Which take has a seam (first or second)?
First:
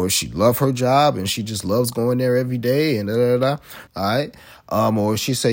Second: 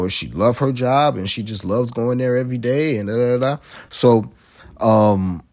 first